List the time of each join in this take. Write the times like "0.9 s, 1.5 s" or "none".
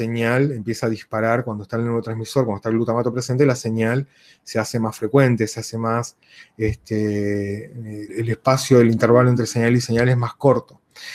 8.1 s